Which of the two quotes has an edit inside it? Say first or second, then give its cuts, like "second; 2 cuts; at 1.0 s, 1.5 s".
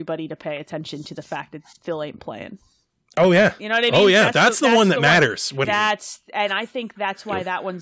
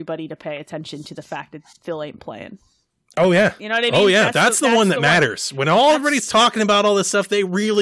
first; 1 cut; at 5.6 s